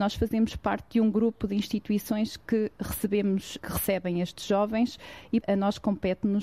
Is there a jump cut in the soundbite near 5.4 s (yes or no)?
yes